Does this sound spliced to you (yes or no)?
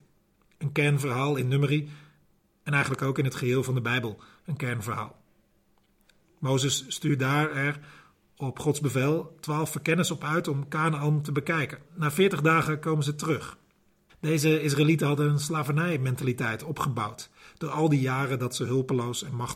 yes